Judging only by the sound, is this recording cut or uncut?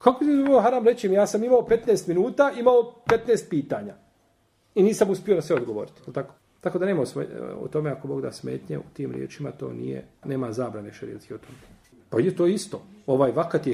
cut